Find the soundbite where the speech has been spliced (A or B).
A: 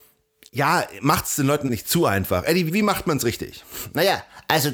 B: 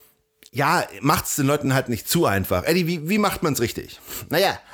A